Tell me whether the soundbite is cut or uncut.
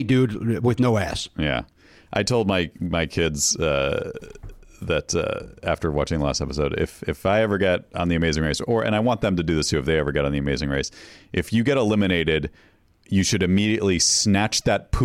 uncut